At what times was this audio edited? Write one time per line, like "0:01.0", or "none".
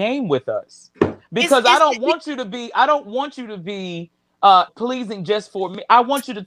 0:04.7